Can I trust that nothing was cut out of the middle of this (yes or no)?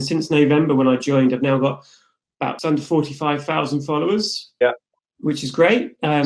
no